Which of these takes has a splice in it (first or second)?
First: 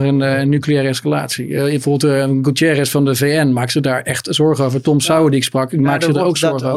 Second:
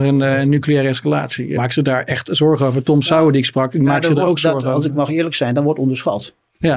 second